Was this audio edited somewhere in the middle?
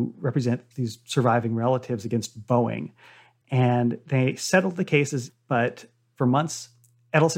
no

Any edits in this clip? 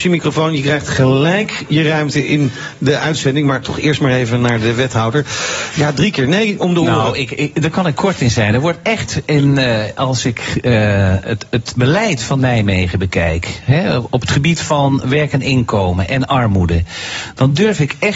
no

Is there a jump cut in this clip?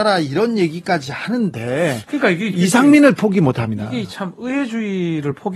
no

